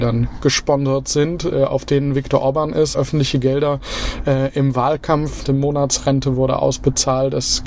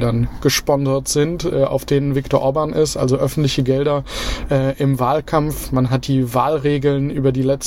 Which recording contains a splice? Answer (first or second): first